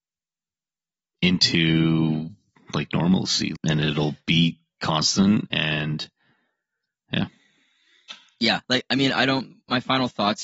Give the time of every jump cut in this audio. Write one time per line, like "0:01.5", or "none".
0:03.6
0:08.6